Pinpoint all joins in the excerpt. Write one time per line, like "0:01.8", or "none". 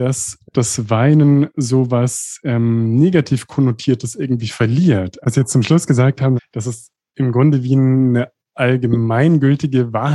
0:05.2
0:06.4